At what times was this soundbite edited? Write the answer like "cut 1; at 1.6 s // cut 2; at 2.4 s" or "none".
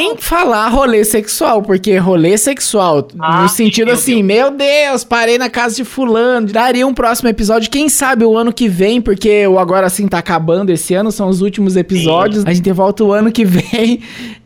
cut 1; at 6.5 s // cut 2; at 12.4 s